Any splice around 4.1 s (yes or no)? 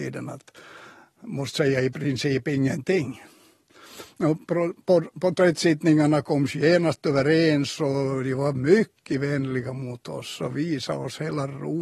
no